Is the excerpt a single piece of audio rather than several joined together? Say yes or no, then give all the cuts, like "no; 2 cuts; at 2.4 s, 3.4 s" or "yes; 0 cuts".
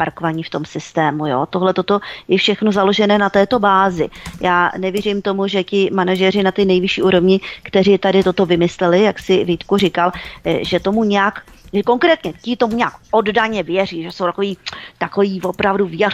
yes; 0 cuts